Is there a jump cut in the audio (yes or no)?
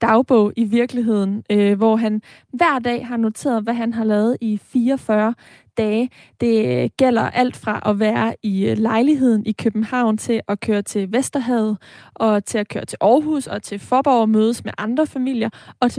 no